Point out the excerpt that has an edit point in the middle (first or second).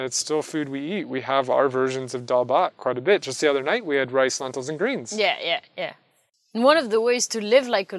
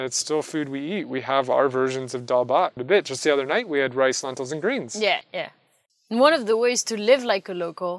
second